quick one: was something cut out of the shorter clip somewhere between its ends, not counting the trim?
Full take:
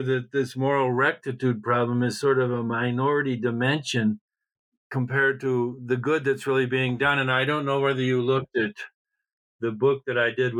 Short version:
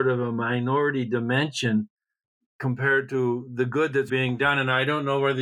yes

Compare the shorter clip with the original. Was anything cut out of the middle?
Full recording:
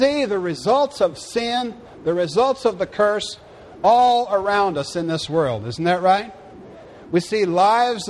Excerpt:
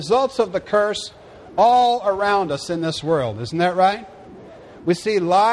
no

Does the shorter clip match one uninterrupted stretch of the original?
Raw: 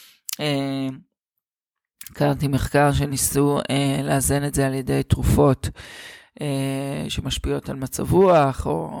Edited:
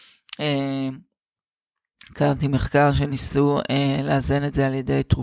yes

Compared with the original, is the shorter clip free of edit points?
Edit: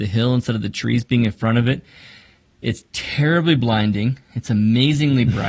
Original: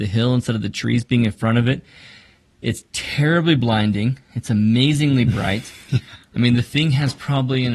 yes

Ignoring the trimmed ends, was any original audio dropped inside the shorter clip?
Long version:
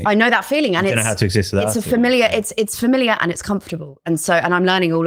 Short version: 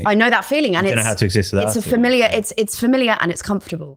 no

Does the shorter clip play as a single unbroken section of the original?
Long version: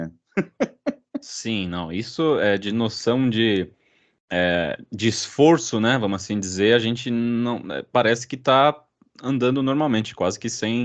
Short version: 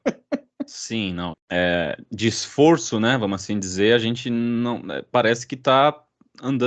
no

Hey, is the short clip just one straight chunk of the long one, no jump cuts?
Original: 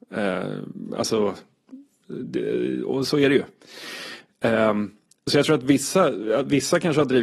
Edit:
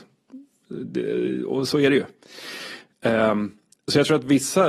yes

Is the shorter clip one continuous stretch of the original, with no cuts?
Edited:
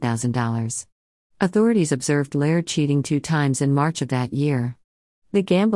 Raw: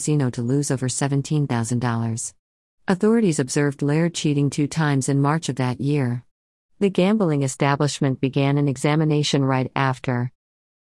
yes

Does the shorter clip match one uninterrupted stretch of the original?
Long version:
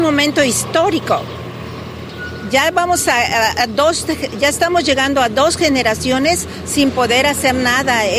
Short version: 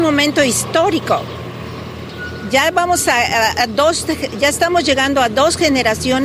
yes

